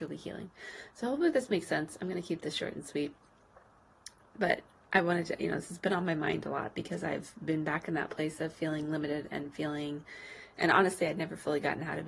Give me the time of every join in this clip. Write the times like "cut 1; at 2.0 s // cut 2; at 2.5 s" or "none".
none